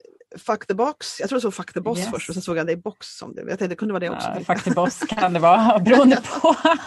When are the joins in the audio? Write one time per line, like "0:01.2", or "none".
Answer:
none

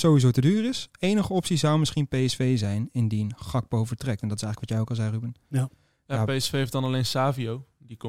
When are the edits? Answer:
none

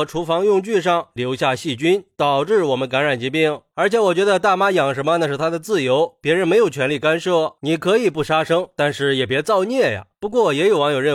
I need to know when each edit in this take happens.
0:03.7
0:07.6

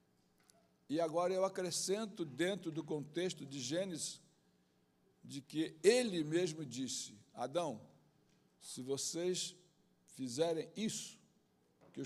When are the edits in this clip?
none

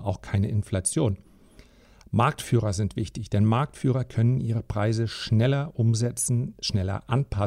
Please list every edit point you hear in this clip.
none

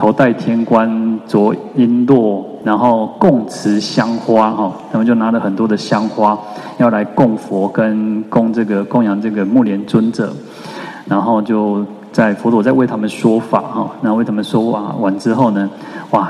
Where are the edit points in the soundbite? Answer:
none

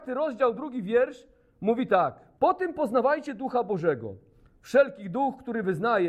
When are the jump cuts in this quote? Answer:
0:02.4

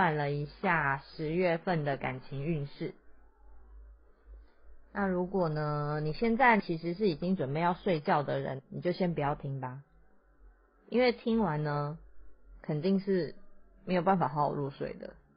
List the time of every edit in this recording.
none

